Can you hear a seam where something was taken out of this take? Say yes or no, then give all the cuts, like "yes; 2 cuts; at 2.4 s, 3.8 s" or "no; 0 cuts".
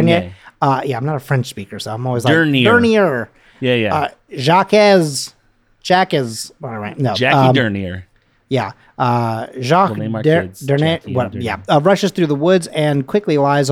no; 0 cuts